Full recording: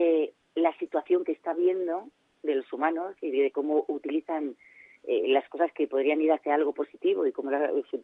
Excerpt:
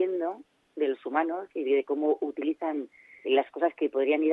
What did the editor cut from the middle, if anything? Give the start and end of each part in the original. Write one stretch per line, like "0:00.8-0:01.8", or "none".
0:04.9-0:05.2